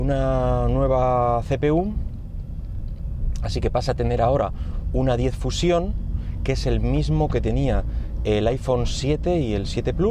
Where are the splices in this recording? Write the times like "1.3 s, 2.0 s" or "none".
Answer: none